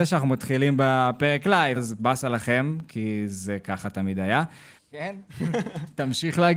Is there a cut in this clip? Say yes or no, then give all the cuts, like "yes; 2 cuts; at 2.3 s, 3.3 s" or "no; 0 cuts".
yes; 2 cuts; at 1.8 s, 4.8 s